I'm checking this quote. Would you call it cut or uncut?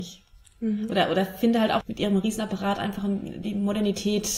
cut